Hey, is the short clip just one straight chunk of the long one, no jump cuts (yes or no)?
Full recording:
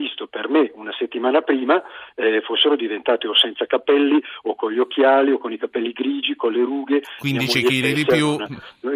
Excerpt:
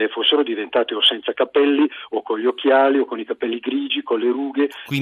yes